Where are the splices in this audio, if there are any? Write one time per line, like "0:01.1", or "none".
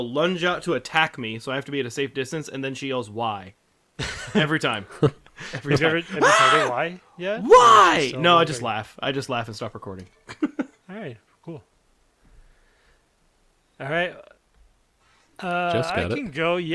none